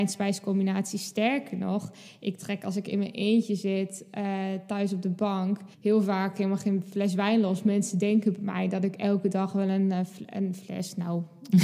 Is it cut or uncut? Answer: cut